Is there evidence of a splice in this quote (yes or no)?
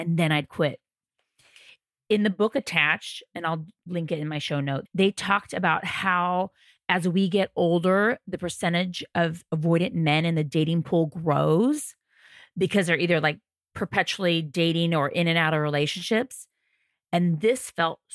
yes